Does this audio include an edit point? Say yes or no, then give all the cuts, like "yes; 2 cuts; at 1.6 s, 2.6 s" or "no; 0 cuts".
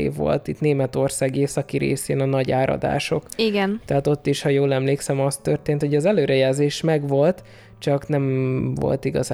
no; 0 cuts